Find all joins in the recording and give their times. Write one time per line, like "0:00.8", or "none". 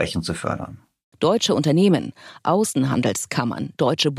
0:01.1